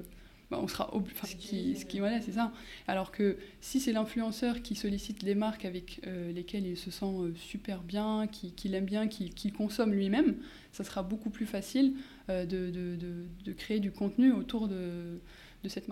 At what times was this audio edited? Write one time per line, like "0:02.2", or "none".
0:01.2